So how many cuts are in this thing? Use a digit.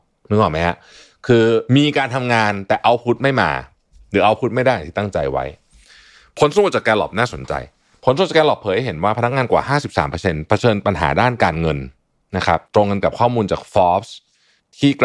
2